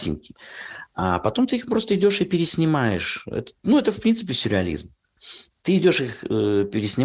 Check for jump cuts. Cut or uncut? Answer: uncut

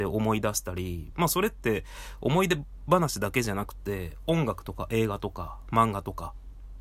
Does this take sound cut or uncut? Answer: cut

